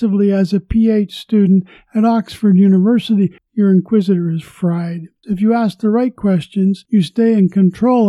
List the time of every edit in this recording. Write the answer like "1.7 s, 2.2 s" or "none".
3.4 s, 5.2 s